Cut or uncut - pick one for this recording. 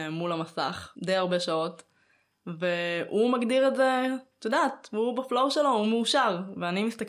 cut